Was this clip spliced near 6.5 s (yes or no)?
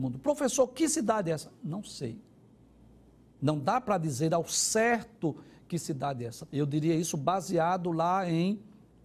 yes